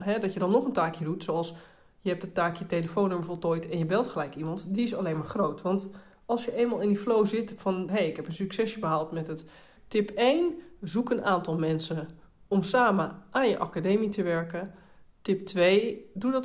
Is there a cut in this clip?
yes; 2 cuts; at 7.9 s, 9.8 s

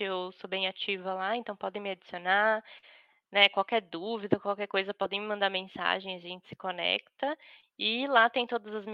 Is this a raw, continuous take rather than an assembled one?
yes; 0 cuts

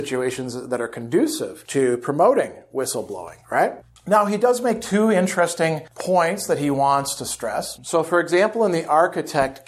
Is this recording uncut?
no; 1 cut; at 7.8 s

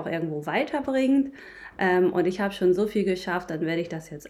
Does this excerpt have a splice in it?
no; 0 cuts

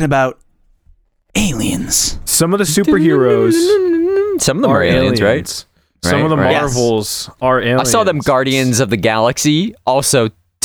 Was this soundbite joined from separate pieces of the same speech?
no; 0 cuts

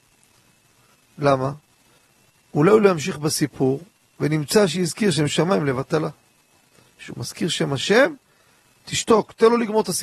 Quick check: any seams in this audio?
no; 0 cuts

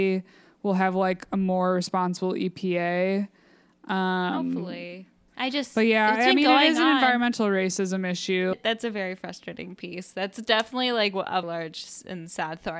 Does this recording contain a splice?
yes; 3 cuts; at 5.3 s, 8.5 s, 11.4 s

